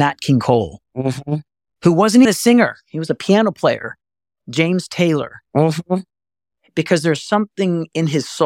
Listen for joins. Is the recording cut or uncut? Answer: cut